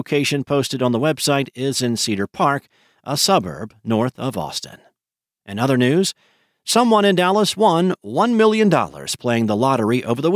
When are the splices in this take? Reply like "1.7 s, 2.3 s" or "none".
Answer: 5.3 s